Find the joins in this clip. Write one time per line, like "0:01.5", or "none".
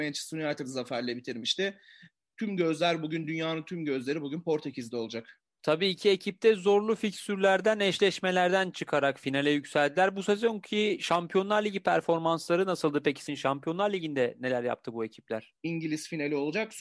0:13.3
0:15.6